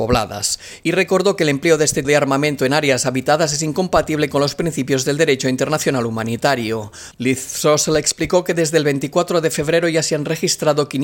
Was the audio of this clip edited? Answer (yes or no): yes